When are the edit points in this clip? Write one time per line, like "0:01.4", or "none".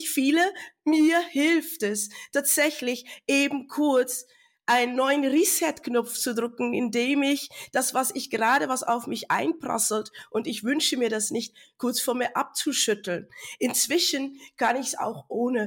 none